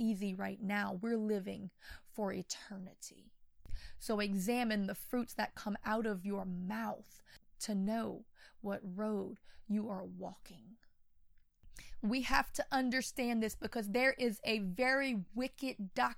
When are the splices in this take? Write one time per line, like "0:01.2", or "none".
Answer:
none